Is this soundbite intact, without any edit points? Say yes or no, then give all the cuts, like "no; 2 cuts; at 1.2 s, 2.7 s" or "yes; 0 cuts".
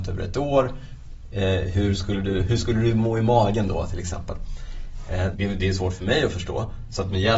no; 1 cut; at 5.3 s